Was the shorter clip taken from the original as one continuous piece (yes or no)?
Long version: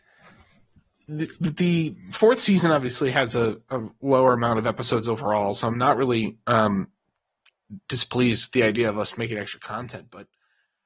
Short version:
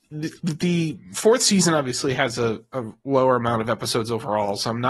yes